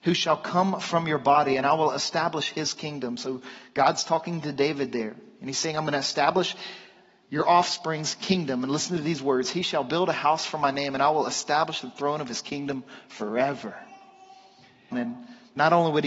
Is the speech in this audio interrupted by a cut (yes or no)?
yes